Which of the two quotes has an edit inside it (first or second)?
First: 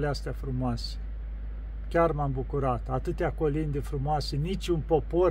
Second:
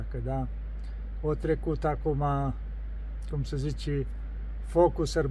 second